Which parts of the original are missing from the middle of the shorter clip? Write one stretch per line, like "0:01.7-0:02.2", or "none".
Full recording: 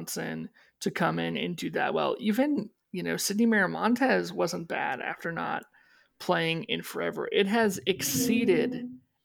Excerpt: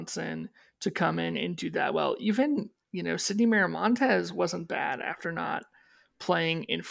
none